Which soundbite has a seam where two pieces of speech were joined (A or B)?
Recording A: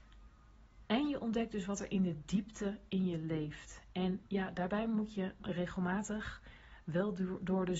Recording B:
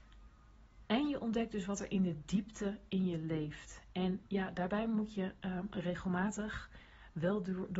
A